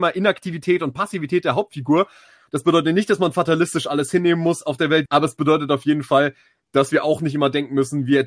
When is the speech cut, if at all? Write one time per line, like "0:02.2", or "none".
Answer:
0:02.5
0:05.1